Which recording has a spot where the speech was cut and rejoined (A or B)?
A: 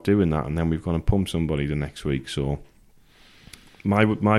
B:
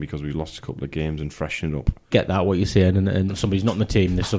B